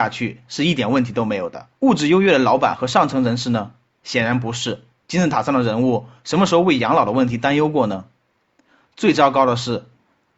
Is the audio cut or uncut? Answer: cut